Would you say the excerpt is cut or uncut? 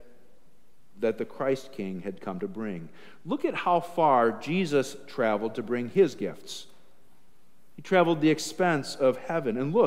uncut